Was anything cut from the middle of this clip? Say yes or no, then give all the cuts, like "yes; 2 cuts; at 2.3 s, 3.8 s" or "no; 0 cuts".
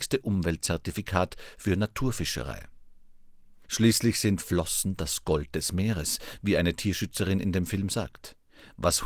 yes; 1 cut; at 3.6 s